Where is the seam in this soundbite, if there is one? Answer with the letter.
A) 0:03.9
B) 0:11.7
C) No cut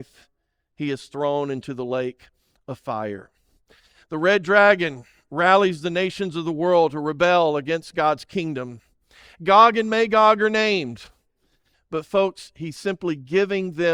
B